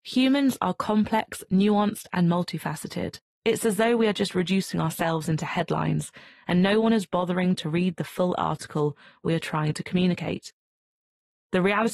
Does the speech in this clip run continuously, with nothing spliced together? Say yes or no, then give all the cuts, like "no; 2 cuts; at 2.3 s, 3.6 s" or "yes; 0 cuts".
no; 1 cut; at 3.4 s